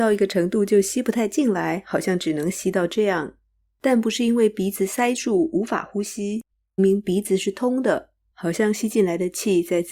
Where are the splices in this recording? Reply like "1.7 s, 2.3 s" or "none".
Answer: 6.8 s

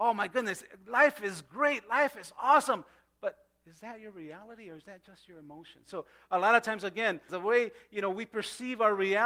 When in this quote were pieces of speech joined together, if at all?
5.9 s, 7.3 s

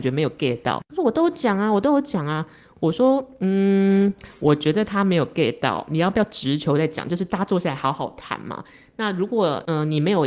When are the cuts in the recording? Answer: none

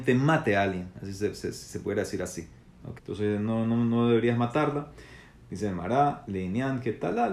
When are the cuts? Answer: 3.0 s

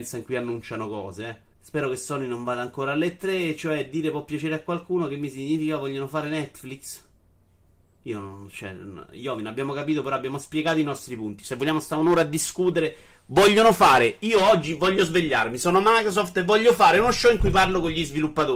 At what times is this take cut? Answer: 1.5 s

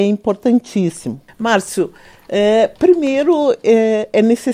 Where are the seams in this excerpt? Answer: 1.3 s

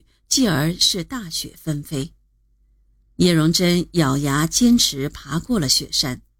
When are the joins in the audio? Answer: none

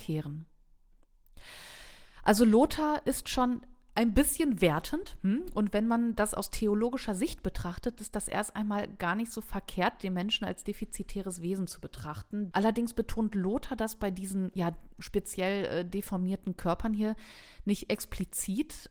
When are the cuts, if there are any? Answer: 12.5 s

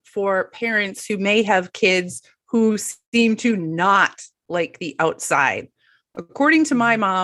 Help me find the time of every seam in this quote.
none

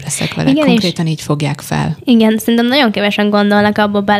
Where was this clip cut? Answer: none

